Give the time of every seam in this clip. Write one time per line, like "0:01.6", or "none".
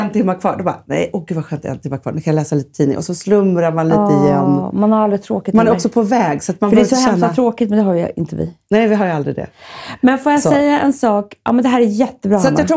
none